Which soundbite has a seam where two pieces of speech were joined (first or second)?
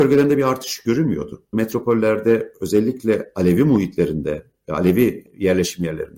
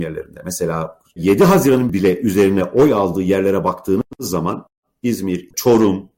first